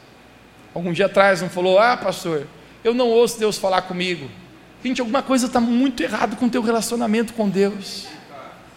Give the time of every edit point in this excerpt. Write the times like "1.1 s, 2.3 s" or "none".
4.8 s